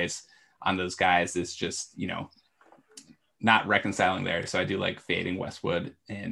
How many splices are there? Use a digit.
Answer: 0